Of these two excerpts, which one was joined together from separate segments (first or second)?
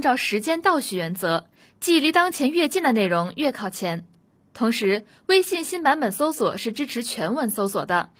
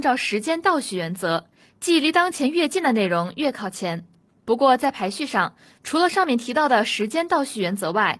second